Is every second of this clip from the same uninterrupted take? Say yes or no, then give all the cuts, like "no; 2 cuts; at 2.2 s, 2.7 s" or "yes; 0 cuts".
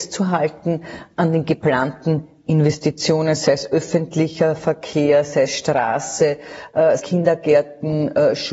no; 1 cut; at 7.0 s